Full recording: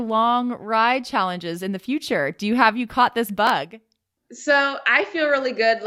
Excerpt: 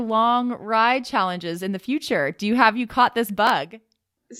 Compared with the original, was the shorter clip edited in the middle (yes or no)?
no